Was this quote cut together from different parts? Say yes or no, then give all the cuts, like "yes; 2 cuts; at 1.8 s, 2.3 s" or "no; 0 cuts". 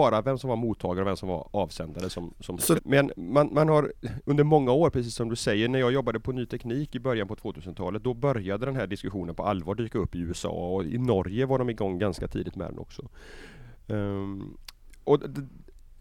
yes; 1 cut; at 2.8 s